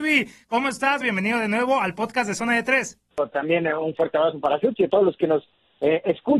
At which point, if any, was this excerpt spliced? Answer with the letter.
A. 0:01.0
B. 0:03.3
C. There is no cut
A